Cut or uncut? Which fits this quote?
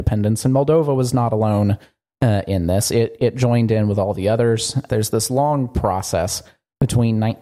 cut